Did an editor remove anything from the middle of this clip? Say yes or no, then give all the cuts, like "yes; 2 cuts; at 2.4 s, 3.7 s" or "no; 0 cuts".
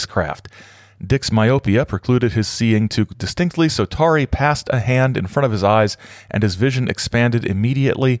no; 0 cuts